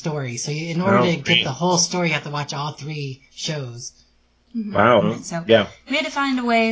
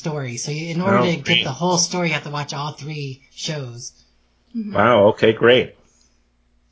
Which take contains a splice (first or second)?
first